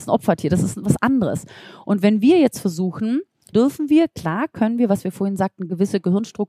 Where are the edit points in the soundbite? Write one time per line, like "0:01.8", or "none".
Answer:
0:03.5